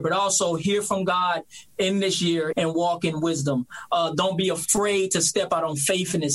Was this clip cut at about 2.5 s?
yes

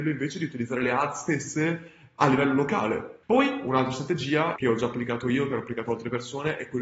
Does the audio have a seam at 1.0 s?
no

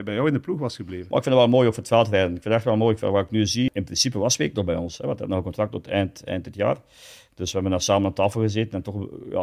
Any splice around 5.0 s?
no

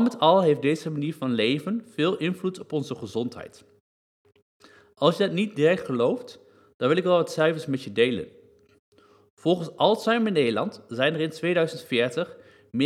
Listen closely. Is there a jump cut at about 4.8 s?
no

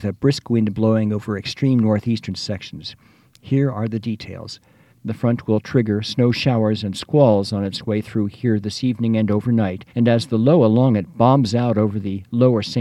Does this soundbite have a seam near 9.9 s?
yes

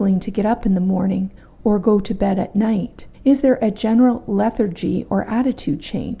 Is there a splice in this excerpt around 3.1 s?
yes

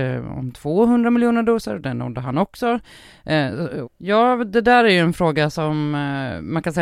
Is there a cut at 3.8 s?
yes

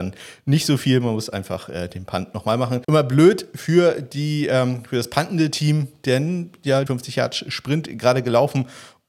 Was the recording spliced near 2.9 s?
no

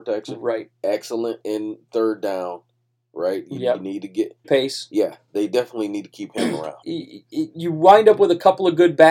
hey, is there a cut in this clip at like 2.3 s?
no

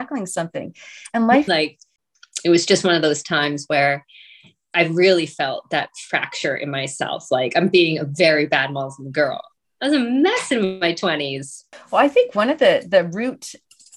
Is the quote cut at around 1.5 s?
yes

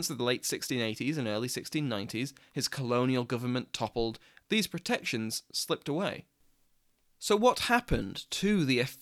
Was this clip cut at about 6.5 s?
no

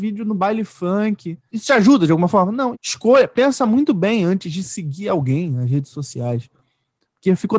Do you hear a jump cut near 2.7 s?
yes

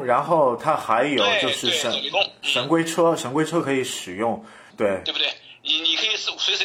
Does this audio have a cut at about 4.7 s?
yes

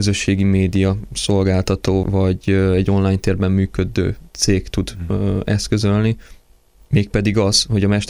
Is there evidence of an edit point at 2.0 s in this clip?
yes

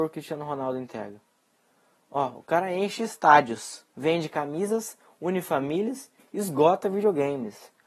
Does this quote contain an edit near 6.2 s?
yes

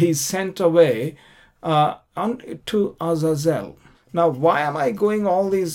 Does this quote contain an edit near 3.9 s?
yes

